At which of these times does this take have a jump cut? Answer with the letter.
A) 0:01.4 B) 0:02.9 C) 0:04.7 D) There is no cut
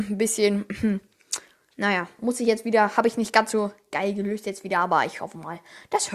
D